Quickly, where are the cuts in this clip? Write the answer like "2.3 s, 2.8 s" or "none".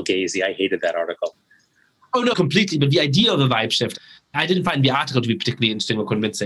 2.3 s

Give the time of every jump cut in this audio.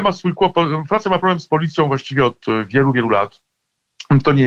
none

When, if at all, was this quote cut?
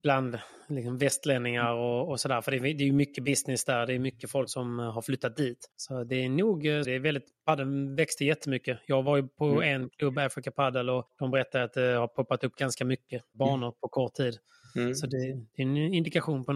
4.5 s, 6.8 s

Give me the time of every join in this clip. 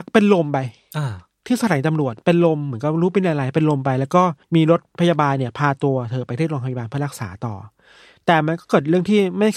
4.4 s

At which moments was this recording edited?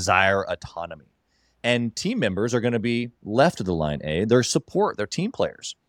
none

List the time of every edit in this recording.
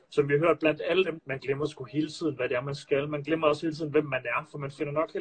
1.2 s

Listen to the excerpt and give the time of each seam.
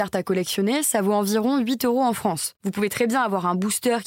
2.6 s

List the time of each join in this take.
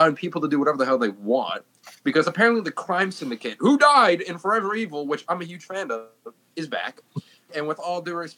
7.5 s

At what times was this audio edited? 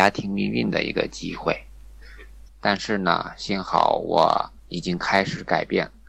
2.5 s, 4.6 s

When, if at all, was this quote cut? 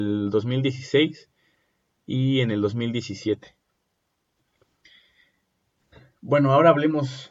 none

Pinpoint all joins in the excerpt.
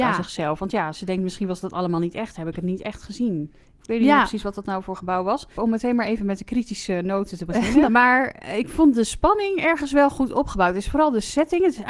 3.8 s, 5.5 s, 7.8 s

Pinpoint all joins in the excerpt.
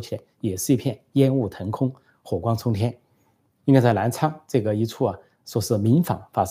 3.6 s

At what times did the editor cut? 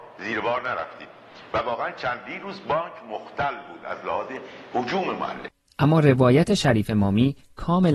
none

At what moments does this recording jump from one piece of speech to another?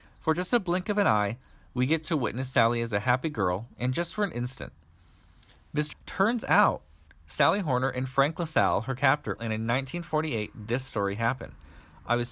5.9 s, 9.4 s

